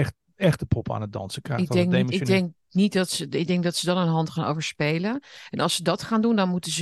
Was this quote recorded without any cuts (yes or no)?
yes